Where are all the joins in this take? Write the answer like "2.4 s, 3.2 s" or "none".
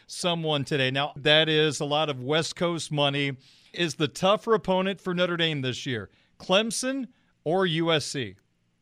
1.2 s, 3.7 s